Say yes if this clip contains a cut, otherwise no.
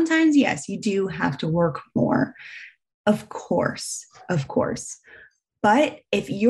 no